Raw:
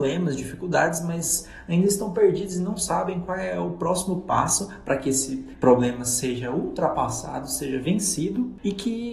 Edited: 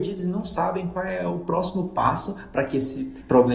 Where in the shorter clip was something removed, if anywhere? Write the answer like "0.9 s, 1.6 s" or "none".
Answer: none